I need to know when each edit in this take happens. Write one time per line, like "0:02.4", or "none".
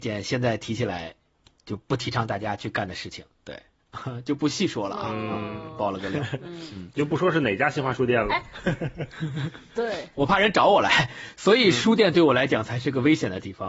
none